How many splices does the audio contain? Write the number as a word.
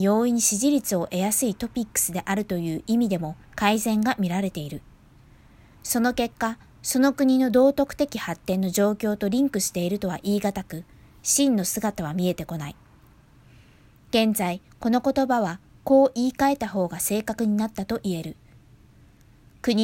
one